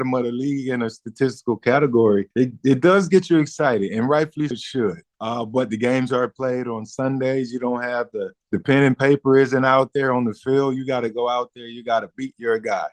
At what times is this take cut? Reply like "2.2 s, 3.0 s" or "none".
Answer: 4.5 s